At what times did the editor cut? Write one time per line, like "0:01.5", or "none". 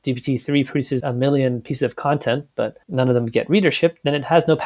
0:01.0
0:02.8